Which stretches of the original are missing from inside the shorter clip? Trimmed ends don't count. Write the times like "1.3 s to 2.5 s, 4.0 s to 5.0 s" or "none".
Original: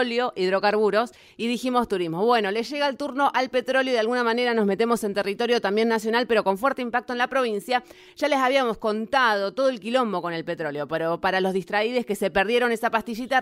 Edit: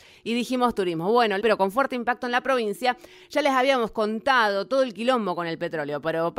2.5 s to 6.3 s